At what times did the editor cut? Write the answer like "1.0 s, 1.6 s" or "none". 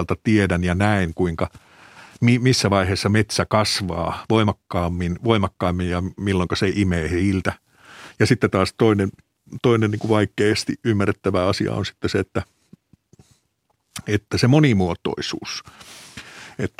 none